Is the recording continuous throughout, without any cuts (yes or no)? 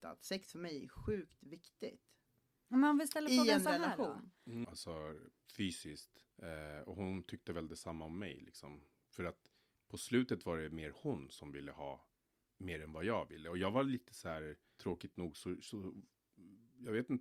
no